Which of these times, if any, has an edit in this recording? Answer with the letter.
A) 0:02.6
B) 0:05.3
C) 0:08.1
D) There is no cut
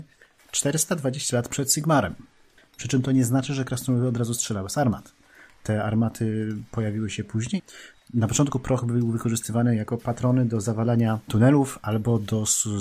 A